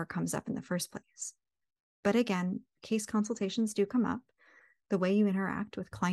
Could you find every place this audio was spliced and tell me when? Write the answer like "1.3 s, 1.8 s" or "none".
none